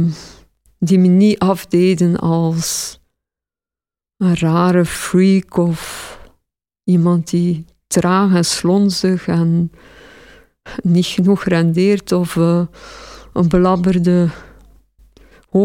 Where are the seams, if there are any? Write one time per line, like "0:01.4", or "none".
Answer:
none